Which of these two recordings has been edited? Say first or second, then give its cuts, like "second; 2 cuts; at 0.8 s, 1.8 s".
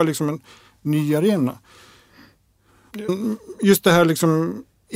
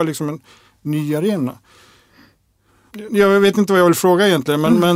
first; 1 cut; at 3.1 s